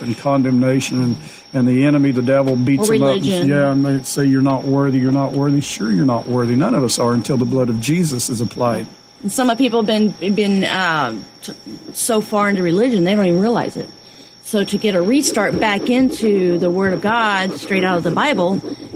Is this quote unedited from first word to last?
yes; 0 cuts

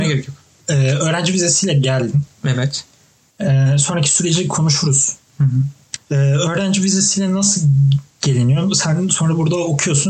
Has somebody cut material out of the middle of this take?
yes; 1 cut; at 6.0 s

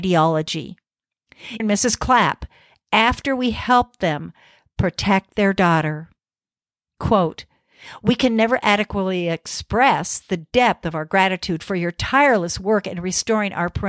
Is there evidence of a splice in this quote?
yes; 1 cut; at 1.6 s

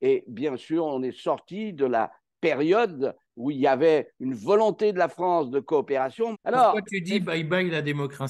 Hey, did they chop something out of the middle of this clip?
yes; 1 cut; at 6.3 s

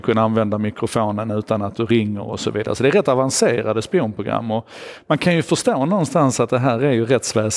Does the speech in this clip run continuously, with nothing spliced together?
yes; 0 cuts

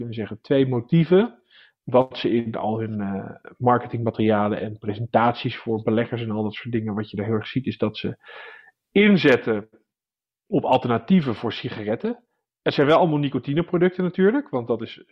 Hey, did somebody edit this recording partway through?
no; 0 cuts

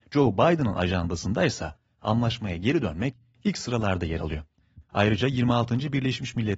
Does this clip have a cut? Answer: yes; 1 cut; at 4.8 s

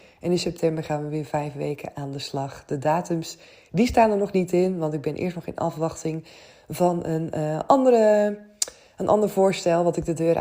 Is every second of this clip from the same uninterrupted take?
yes; 0 cuts

